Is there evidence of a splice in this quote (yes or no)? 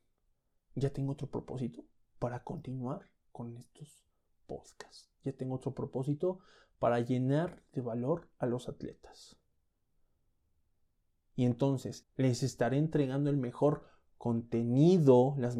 yes